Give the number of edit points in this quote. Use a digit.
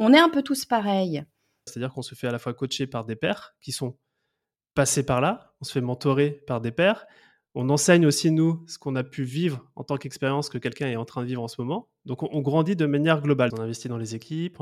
2